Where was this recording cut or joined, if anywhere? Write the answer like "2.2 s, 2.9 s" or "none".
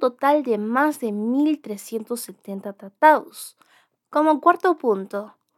4.0 s